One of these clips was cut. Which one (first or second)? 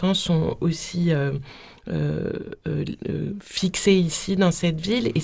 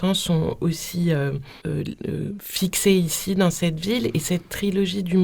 second